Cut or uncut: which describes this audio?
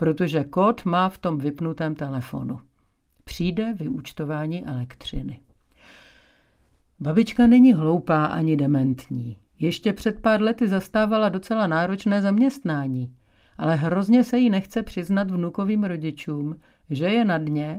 uncut